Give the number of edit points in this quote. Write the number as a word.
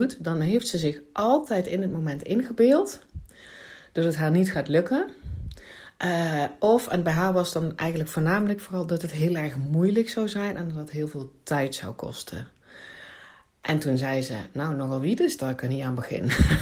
zero